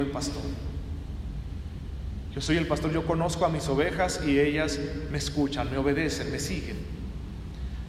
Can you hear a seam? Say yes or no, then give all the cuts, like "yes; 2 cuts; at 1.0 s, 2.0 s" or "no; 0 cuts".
no; 0 cuts